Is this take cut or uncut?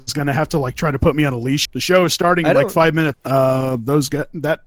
cut